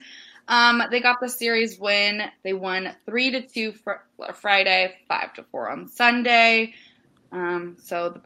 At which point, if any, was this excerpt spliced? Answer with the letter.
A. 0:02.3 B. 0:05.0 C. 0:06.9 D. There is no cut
B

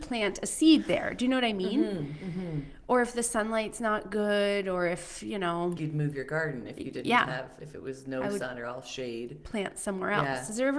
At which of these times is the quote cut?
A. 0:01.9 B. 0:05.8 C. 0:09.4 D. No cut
B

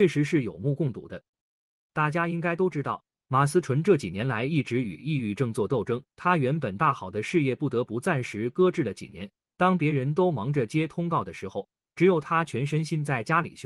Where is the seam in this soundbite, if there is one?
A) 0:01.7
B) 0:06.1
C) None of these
B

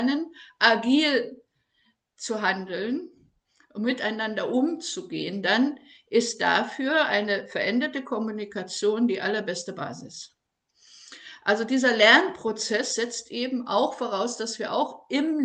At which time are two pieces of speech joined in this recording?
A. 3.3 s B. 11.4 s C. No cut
C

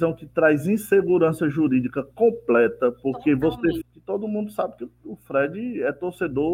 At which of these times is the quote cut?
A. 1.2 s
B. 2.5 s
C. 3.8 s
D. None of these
C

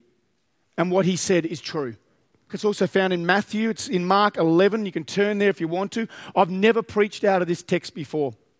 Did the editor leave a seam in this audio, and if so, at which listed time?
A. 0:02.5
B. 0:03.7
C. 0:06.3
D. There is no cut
A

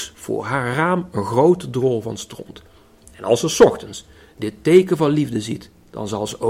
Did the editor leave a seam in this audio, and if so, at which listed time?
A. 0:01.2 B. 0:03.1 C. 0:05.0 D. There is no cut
D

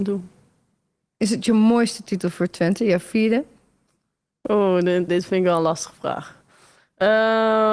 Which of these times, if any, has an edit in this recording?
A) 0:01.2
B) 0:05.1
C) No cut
B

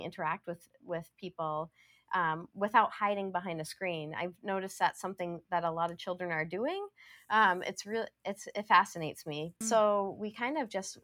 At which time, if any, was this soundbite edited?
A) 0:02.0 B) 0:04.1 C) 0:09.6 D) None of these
C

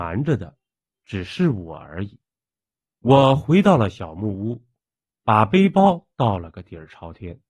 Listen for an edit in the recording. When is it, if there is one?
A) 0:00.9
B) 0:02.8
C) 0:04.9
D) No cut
B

